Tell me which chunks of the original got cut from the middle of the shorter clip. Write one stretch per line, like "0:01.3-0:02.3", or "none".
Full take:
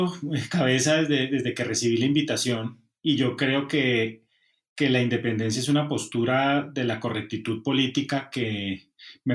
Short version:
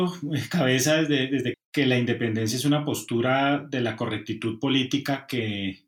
0:01.5-0:04.6